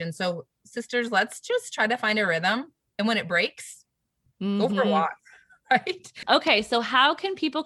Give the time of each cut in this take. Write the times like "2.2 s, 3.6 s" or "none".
4.3 s, 6.2 s